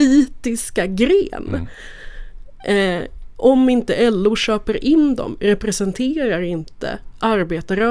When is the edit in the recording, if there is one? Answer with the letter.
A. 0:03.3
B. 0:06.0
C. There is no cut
A